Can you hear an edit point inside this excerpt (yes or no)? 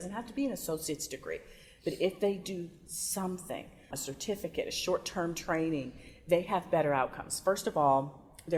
yes